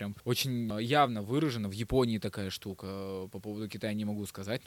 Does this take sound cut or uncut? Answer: uncut